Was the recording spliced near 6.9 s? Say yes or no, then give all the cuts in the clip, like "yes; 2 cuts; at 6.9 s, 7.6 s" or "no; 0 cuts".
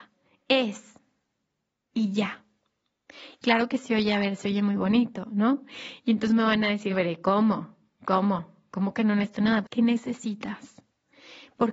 yes; 2 cuts; at 6.9 s, 9.6 s